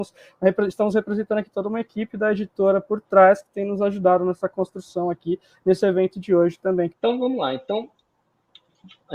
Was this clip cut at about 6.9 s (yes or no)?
yes